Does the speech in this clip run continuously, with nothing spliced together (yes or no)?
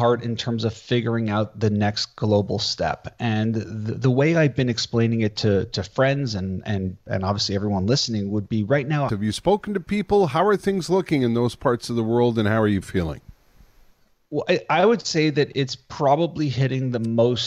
no